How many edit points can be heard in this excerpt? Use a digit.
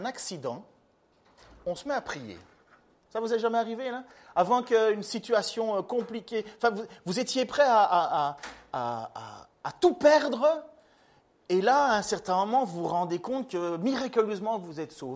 0